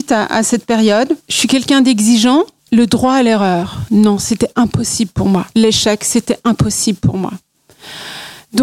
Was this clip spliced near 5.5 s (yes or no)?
yes